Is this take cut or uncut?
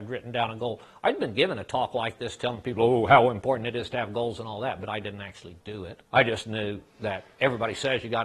cut